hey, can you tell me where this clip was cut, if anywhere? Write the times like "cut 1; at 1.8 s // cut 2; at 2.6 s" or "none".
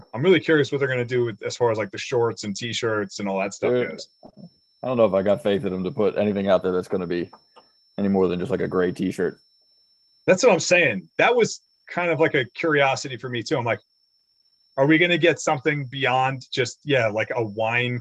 cut 1; at 16.5 s

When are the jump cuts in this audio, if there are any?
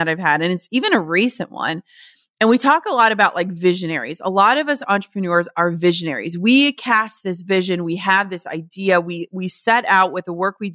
none

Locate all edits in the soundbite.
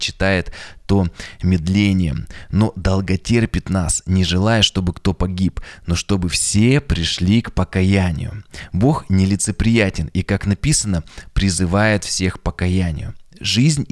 none

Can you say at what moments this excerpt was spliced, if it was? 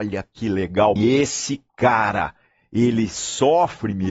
cut 1; at 1.0 s

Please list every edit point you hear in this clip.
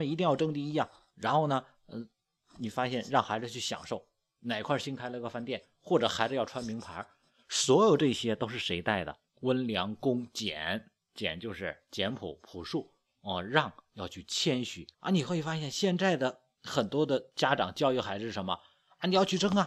cut 1; at 9.3 s // cut 2; at 14.9 s

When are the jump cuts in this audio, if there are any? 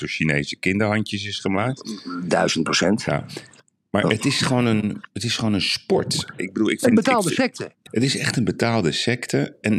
cut 1; at 6.4 s // cut 2; at 7.9 s

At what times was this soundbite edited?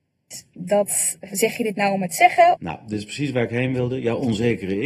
cut 1; at 2.6 s

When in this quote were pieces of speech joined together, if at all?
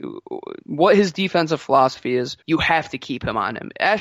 cut 1; at 2.4 s

